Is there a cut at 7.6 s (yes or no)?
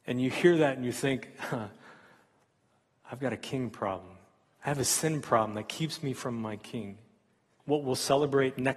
yes